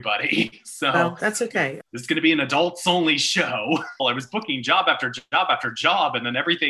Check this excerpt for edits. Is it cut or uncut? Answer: cut